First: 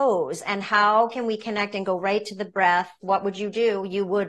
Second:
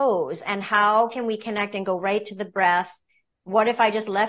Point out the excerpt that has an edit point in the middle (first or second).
first